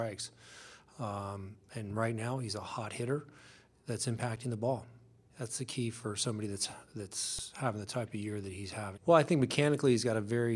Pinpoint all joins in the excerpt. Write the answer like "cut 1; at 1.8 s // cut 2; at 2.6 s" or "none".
cut 1; at 5.3 s // cut 2; at 8.9 s